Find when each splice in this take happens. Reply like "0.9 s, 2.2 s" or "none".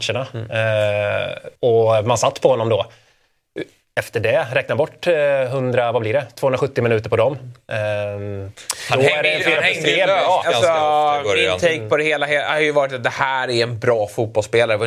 1.6 s